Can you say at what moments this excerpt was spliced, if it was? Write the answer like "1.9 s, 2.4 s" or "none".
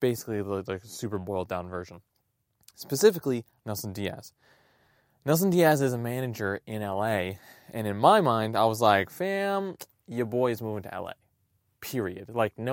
3.6 s